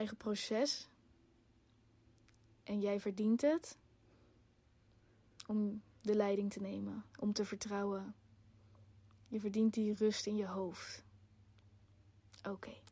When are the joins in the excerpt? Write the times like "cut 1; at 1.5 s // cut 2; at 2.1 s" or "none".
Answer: none